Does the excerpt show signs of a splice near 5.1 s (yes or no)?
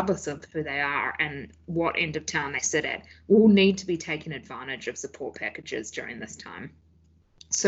no